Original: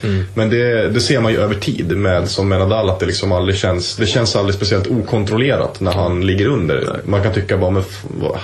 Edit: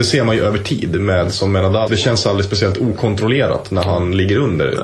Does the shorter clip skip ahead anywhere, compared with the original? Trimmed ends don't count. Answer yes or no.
yes